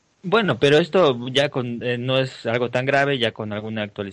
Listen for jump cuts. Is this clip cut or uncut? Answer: uncut